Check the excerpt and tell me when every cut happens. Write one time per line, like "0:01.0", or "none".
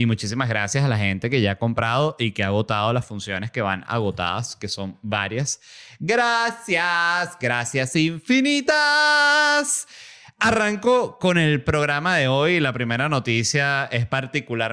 none